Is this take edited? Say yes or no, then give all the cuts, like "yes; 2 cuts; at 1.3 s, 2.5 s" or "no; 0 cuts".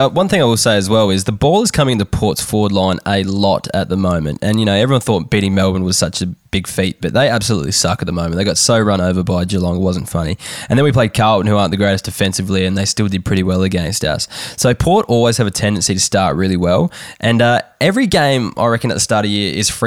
no; 0 cuts